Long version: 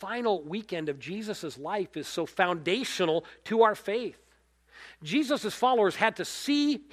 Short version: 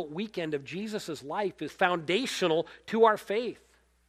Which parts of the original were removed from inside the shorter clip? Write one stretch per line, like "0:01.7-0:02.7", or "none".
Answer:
0:02.0-0:02.3

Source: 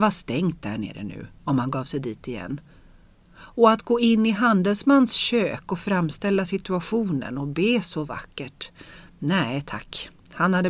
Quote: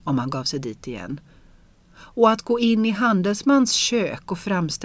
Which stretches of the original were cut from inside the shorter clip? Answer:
none

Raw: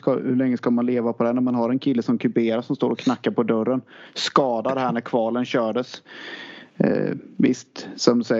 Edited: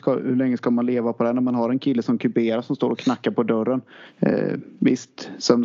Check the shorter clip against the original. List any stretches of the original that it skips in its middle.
0:04.1-0:06.7

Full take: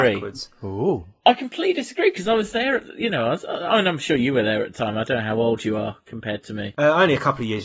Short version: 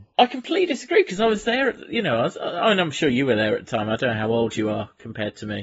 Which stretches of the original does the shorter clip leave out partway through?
none

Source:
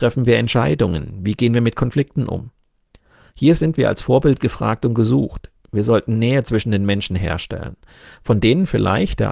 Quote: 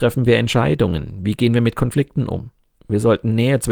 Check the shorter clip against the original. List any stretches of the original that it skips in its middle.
0:02.8-0:05.6

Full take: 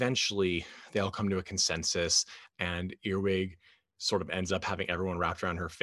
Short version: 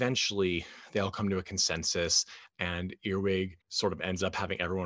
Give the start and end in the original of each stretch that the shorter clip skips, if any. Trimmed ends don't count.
0:03.6-0:03.9

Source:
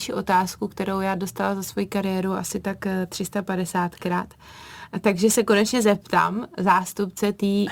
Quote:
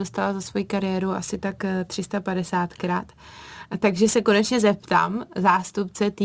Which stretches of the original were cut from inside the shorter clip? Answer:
none

